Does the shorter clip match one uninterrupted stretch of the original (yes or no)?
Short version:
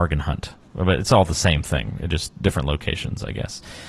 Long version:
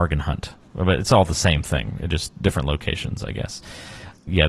yes